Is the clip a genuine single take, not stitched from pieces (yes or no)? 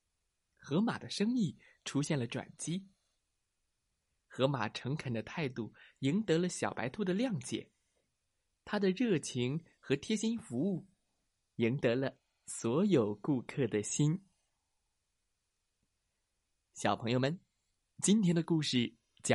yes